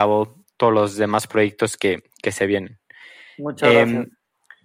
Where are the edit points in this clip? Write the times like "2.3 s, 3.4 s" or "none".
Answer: none